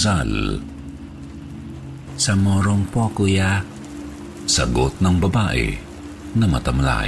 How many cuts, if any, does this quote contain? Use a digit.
1